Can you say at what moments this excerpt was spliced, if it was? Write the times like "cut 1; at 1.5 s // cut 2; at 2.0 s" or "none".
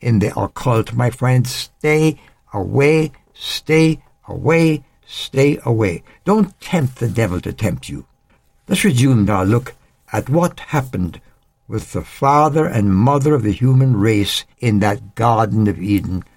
cut 1; at 9.3 s // cut 2; at 14.5 s